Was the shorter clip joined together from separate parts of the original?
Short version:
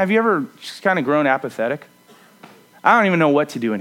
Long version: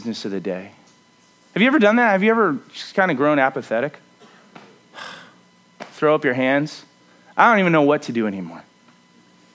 yes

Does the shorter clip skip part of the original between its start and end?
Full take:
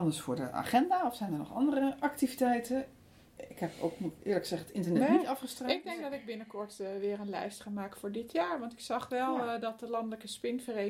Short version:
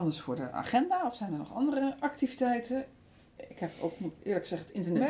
no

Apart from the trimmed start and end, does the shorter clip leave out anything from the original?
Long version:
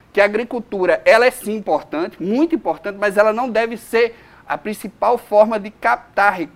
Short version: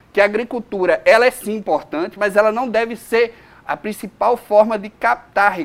yes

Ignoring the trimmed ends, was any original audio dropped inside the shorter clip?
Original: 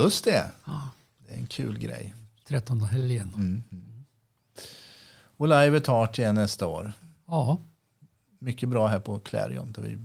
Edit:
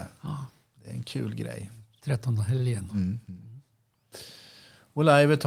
no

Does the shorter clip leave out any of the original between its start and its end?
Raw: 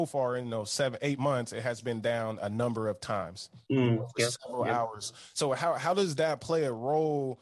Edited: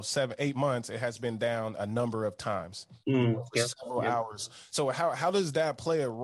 no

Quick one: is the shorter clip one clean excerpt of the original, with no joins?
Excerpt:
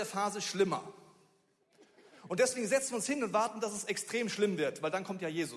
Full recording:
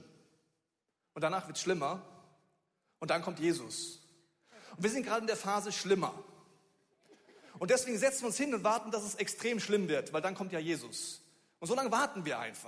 yes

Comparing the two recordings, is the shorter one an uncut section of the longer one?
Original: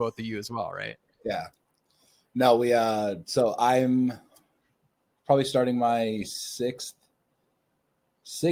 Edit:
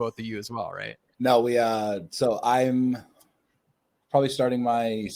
no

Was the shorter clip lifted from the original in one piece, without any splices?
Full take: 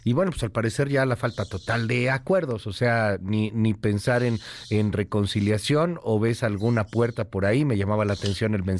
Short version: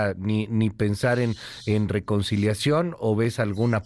yes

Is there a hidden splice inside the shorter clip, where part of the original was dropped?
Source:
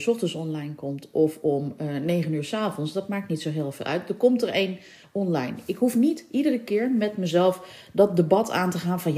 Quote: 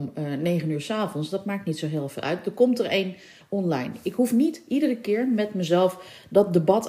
no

